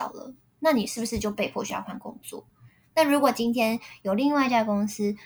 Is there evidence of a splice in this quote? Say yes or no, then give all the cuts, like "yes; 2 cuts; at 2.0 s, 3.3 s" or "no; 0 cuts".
no; 0 cuts